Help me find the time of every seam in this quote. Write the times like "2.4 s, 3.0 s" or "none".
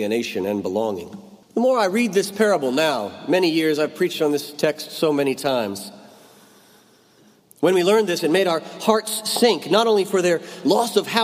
1.4 s, 7.4 s